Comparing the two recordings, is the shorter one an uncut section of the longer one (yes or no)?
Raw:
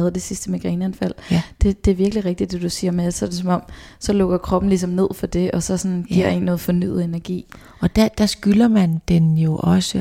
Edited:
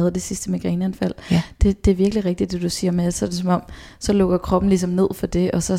yes